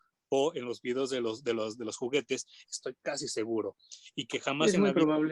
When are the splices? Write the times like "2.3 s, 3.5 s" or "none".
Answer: 2.7 s